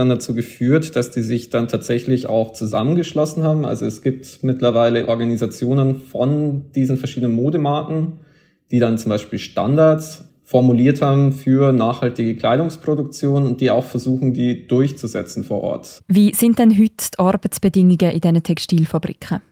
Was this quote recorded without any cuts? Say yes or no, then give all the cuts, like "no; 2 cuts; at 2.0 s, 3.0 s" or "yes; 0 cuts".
no; 1 cut; at 16.0 s